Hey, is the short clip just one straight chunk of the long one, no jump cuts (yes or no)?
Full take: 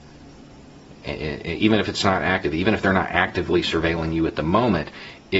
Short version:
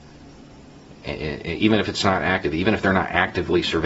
yes